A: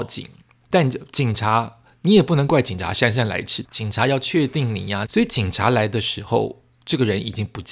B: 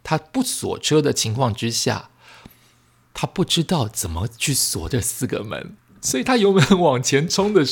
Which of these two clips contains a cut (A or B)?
A